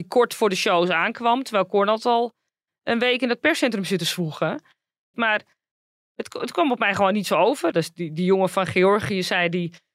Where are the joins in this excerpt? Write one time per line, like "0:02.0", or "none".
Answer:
0:05.1
0:07.7